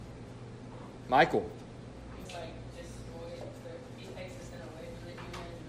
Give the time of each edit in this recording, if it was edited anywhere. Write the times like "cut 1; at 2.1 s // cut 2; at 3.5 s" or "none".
cut 1; at 2.3 s